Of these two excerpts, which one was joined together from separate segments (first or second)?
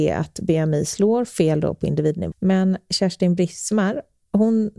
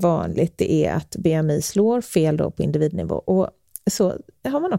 first